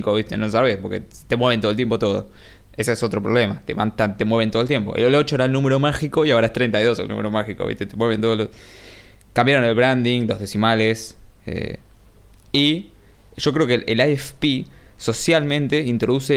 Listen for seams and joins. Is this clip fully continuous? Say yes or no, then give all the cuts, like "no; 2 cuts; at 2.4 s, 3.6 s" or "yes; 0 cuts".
yes; 0 cuts